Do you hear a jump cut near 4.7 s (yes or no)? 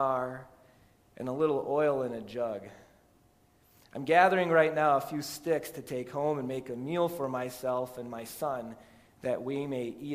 no